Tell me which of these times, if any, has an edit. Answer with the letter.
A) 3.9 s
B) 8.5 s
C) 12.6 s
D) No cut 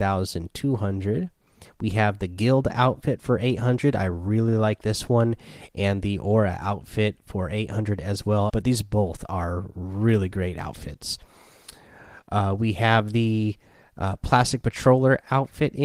B